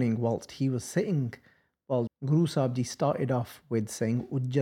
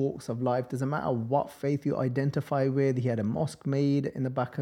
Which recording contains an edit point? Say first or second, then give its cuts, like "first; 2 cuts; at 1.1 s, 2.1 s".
first; 1 cut; at 2.1 s